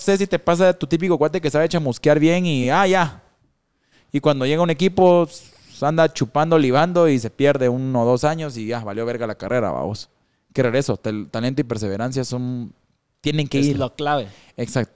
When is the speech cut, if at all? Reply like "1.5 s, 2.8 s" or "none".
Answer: none